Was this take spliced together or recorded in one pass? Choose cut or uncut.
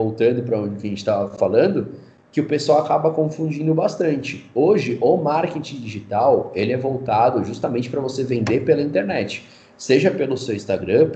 uncut